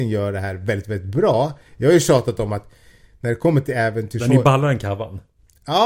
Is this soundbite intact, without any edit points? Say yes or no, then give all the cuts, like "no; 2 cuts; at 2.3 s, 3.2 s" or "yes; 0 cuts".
yes; 0 cuts